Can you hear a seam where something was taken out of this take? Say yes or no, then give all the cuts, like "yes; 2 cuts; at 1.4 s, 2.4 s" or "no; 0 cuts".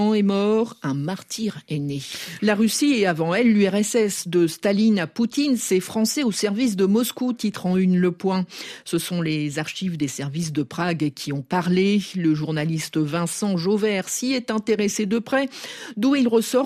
yes; 1 cut; at 2.4 s